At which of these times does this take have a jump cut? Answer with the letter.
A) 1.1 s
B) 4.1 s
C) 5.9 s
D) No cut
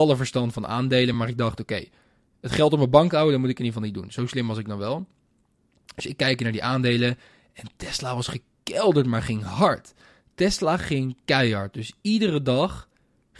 D